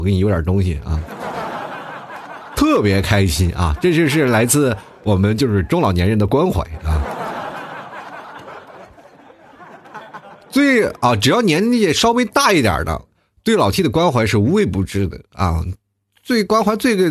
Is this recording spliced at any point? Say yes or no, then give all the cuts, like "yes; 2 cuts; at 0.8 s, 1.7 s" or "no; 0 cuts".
no; 0 cuts